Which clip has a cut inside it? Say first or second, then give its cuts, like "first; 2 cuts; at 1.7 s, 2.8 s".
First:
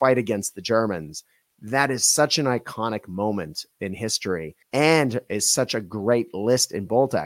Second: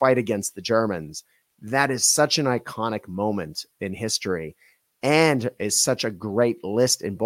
first; 1 cut; at 4.6 s